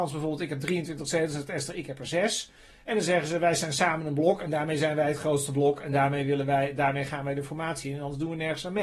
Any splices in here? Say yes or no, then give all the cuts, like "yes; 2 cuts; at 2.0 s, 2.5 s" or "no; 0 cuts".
no; 0 cuts